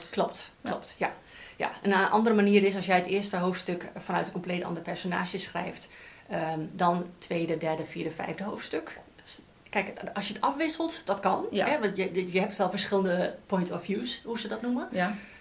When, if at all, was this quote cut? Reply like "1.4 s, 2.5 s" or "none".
none